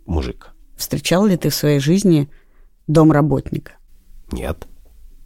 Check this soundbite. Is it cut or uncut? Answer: uncut